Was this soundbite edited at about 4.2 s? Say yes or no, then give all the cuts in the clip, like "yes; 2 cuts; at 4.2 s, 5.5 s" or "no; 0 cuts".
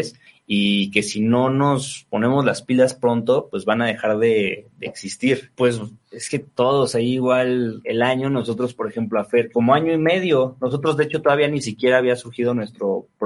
no; 3 cuts; at 5.5 s, 7.8 s, 9.5 s